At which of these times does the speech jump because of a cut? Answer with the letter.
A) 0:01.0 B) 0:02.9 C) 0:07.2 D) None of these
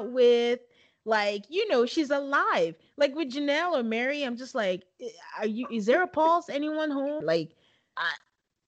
C